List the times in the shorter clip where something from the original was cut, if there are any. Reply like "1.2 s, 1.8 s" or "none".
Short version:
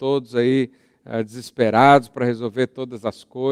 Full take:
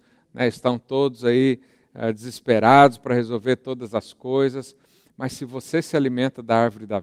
none